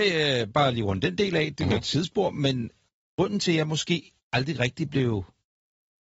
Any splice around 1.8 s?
no; 0 cuts

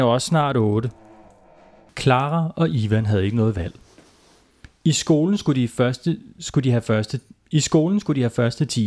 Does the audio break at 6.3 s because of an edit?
no; 0 cuts

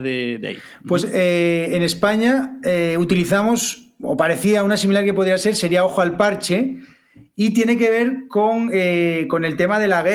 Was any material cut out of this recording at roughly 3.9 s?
no; 0 cuts

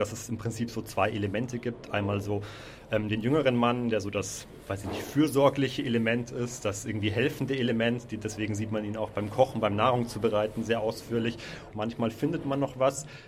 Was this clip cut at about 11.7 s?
yes; 1 cut; at 11.7 s

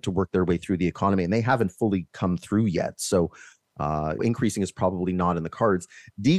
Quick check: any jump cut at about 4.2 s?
yes; 1 cut; at 4.2 s

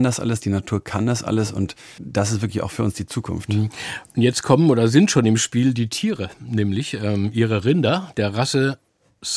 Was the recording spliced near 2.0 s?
yes; 1 cut; at 2.0 s

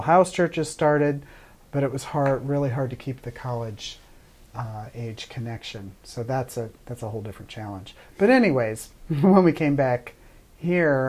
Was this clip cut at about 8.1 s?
no; 0 cuts

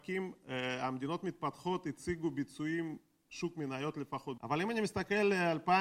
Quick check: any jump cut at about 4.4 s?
yes; 1 cut; at 4.4 s

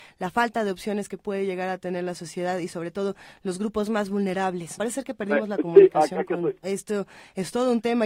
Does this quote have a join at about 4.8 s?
yes; 2 cuts; at 4.8 s, 6.6 s

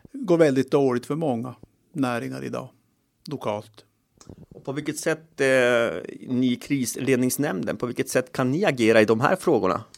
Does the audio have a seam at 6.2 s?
no; 0 cuts

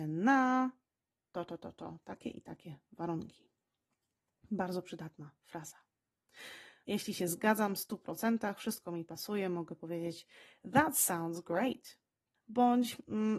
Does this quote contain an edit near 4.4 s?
no; 2 cuts; at 6.8 s, 12.3 s

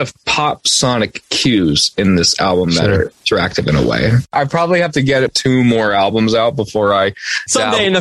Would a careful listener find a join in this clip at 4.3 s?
no; 0 cuts

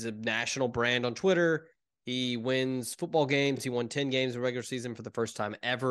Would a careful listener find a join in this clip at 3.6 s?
no; 0 cuts

